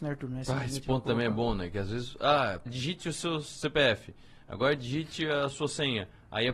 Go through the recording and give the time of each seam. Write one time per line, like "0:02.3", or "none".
0:02.7